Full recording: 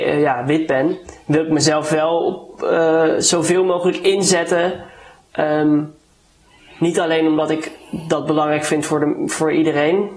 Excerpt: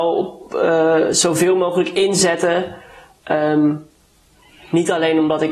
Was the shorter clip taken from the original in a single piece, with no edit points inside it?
yes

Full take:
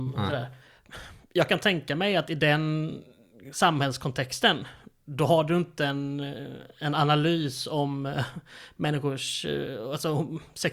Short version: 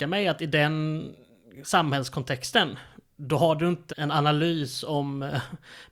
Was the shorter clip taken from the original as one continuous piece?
no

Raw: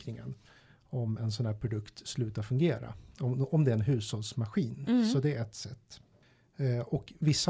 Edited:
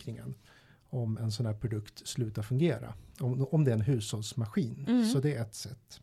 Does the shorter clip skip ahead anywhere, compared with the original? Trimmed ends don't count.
no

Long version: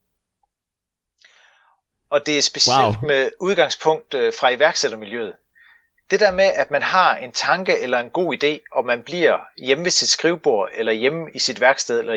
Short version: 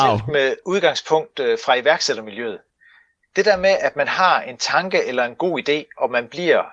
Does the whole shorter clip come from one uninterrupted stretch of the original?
yes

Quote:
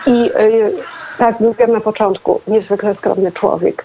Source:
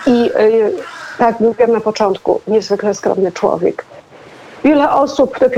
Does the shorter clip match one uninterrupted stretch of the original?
yes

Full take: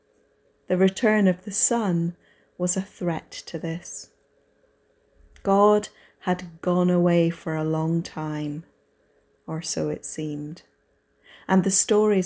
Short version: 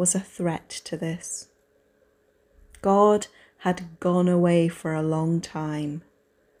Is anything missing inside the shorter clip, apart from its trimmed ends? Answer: no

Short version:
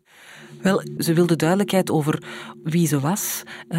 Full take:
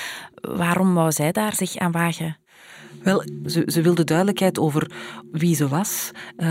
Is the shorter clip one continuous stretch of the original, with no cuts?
no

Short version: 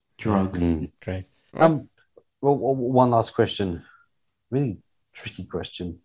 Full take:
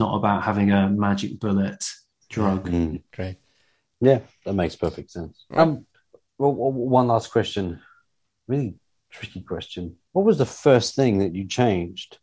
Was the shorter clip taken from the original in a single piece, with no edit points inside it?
no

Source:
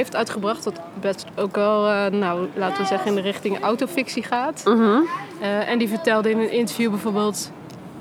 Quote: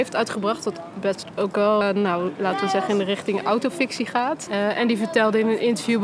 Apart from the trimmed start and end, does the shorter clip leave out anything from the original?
yes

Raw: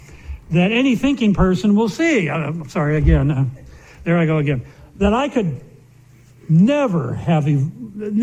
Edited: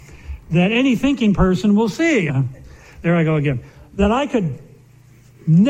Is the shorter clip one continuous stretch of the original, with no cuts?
no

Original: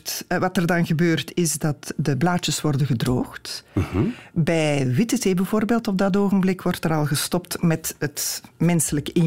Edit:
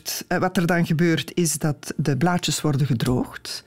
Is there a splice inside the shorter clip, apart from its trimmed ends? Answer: no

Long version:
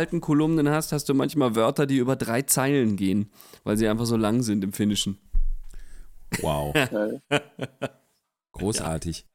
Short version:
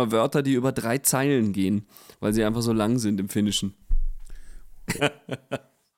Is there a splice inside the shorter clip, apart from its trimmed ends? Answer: yes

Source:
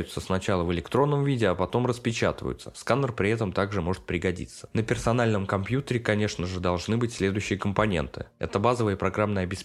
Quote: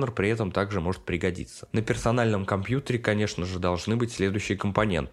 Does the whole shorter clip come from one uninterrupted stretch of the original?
yes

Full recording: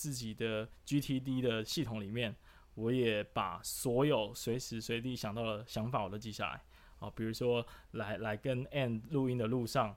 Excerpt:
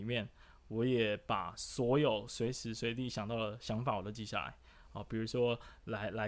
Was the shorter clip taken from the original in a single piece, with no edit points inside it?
yes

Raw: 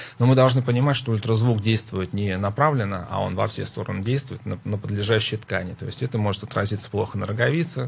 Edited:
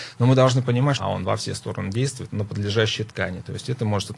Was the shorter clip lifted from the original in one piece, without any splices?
no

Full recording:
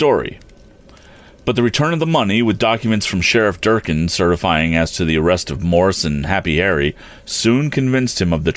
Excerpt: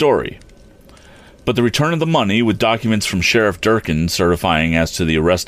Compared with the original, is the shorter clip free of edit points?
yes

